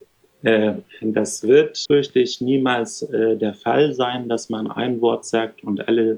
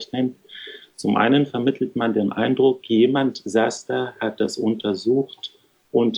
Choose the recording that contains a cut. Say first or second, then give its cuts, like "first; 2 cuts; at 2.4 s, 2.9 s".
first; 1 cut; at 1.9 s